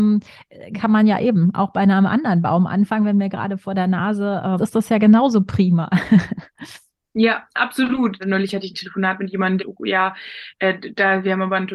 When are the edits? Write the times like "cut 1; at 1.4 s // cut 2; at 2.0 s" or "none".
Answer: cut 1; at 4.6 s // cut 2; at 8.2 s // cut 3; at 9.6 s